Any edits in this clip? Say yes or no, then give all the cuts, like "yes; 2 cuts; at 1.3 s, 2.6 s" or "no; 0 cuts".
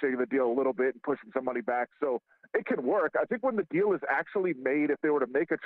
no; 0 cuts